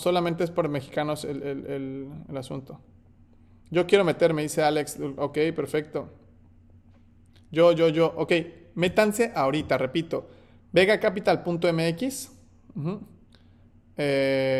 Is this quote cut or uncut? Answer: uncut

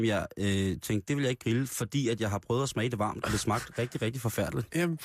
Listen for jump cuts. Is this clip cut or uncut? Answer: uncut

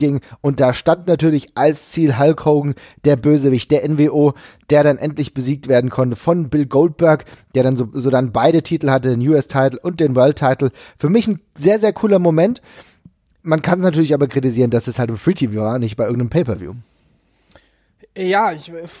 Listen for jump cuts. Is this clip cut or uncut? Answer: uncut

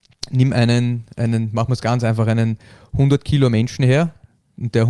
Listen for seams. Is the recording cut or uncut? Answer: uncut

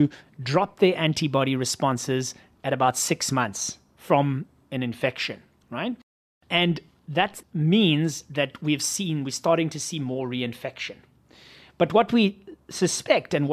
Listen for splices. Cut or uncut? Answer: uncut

